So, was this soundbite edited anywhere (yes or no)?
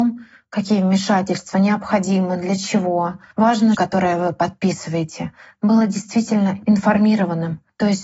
yes